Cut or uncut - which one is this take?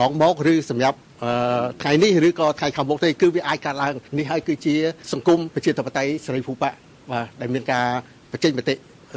cut